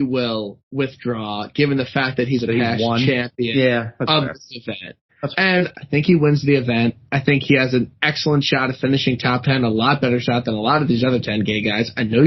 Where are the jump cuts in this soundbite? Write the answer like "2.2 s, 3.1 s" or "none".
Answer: 5.7 s